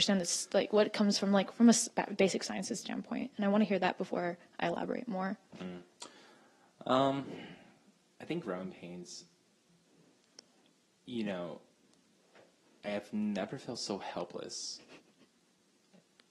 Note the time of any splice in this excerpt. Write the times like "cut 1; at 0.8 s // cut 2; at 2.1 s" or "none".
cut 1; at 8.0 s